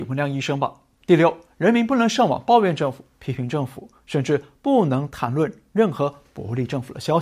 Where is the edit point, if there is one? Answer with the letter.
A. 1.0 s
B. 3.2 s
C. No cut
A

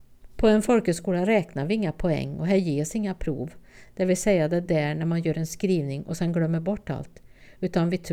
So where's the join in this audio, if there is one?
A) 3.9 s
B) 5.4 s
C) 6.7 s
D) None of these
D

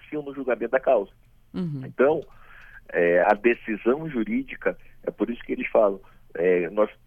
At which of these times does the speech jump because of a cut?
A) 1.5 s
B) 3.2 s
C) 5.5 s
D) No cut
B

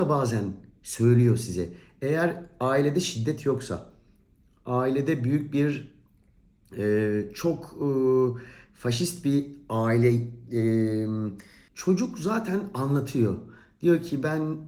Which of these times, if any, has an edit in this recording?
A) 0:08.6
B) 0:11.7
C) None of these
B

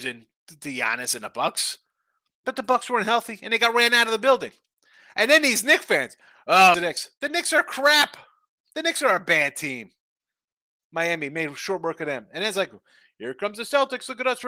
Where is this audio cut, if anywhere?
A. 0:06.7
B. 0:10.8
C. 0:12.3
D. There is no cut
A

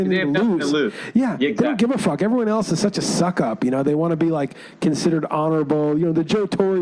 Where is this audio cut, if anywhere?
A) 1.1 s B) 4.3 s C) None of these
C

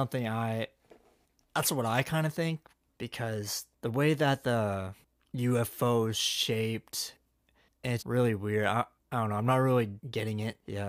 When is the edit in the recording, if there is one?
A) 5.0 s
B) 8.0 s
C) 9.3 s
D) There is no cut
B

